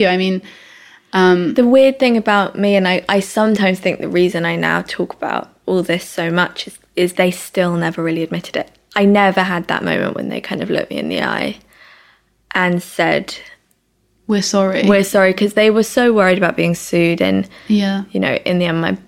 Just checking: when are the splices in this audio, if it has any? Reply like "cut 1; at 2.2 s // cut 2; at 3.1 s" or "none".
none